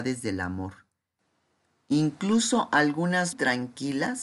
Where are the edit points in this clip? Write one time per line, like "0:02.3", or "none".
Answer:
0:03.3